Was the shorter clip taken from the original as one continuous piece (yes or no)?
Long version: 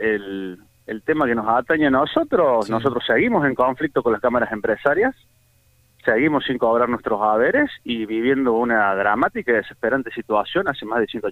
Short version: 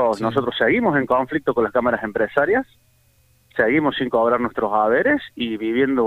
yes